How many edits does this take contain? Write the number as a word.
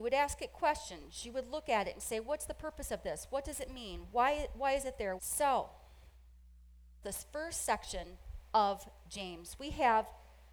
two